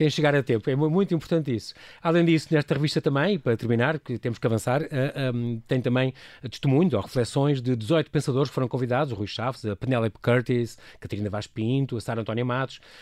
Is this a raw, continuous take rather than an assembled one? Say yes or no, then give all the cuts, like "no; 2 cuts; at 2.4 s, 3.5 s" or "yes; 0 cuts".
yes; 0 cuts